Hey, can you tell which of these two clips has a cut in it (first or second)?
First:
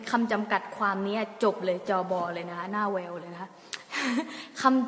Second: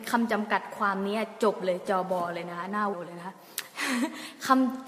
second